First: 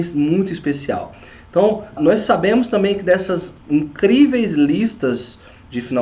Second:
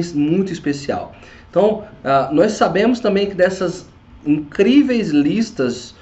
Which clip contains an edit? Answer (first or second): first